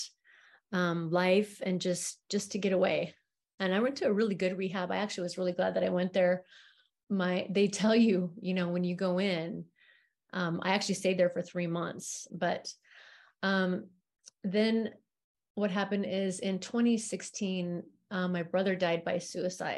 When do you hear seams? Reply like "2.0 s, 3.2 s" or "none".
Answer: 12.3 s

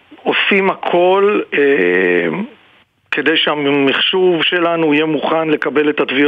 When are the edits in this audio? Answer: none

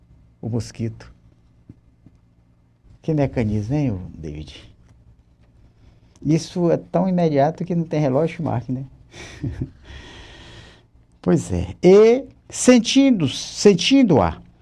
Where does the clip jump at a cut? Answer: 2.9 s

